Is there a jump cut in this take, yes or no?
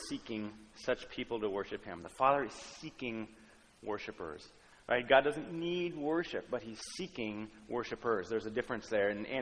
no